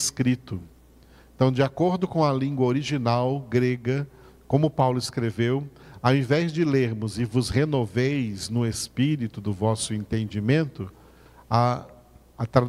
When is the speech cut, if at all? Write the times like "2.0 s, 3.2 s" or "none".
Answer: none